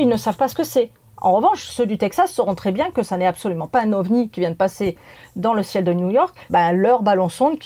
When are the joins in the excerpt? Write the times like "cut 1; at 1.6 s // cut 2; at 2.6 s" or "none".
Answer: cut 1; at 6.5 s